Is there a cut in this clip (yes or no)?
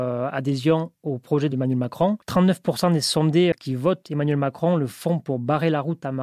yes